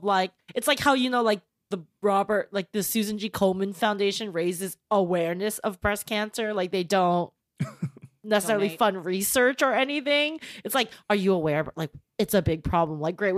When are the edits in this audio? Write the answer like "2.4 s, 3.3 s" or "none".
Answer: none